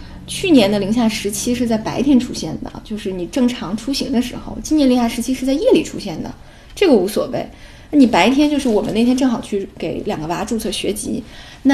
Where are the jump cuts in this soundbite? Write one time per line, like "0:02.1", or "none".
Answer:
none